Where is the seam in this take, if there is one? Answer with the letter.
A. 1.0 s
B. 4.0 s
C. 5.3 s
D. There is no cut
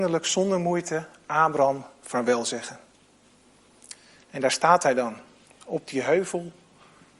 D